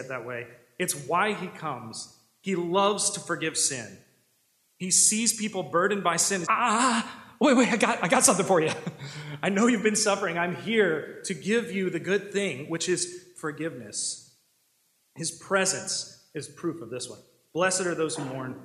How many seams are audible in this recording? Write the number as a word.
one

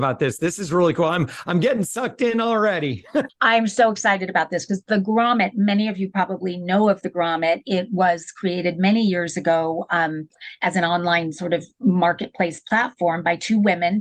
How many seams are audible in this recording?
one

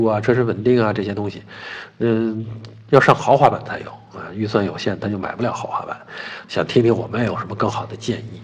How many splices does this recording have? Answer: one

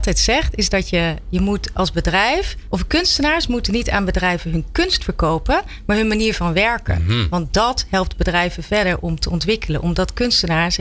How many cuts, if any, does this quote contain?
zero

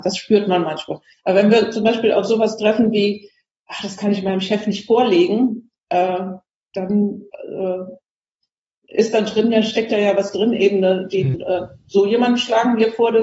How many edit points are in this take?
two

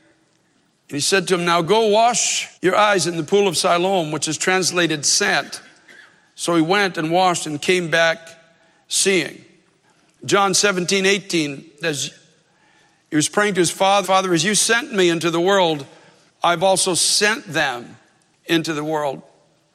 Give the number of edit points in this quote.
three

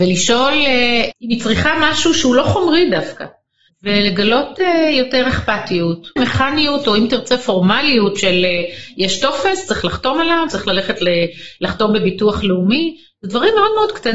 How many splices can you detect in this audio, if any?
three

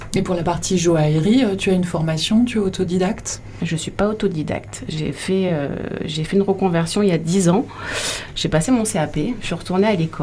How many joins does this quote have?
zero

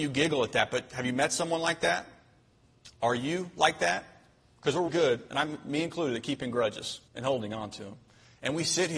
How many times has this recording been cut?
two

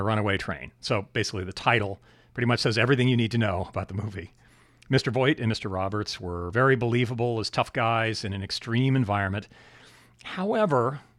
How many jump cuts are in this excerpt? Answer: zero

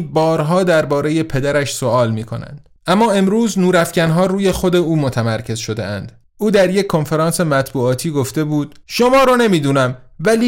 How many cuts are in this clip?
three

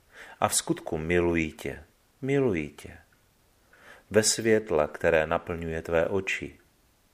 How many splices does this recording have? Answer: one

